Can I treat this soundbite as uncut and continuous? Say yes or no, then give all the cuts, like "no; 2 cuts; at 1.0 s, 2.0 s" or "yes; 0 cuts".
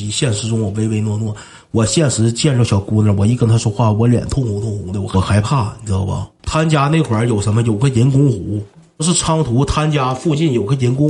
no; 1 cut; at 6.4 s